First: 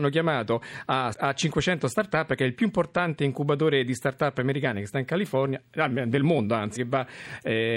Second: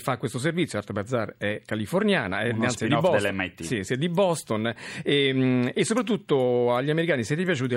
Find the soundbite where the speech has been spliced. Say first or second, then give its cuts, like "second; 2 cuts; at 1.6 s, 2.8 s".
first; 2 cuts; at 1.1 s, 6.8 s